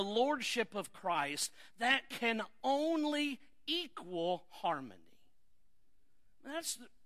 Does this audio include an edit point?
no; 0 cuts

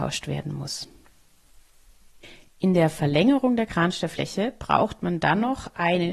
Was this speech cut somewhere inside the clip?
no; 0 cuts

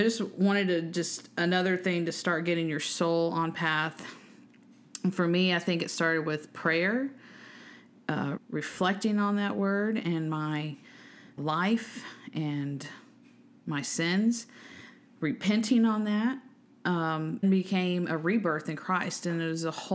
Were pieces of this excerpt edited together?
yes; 3 cuts; at 8.4 s, 11.4 s, 17.4 s

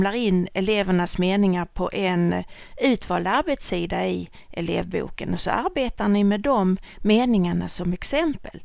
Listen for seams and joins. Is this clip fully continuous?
yes; 0 cuts

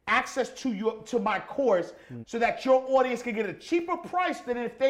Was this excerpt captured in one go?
no; 1 cut; at 2.2 s

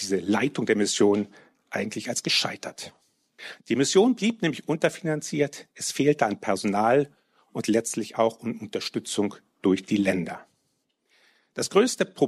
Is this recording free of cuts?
yes; 0 cuts

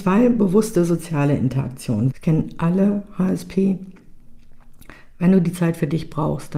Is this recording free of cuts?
no; 1 cut; at 2.1 s

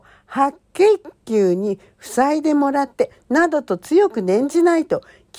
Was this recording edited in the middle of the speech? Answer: no; 0 cuts

